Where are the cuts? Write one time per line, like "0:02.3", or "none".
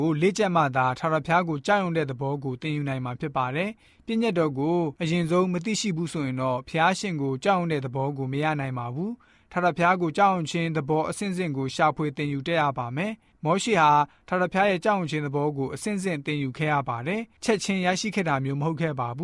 0:05.0